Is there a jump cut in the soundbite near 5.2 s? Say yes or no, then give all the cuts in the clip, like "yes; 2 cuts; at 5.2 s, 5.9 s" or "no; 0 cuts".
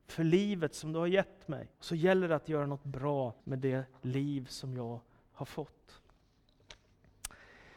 no; 2 cuts; at 1.7 s, 3.4 s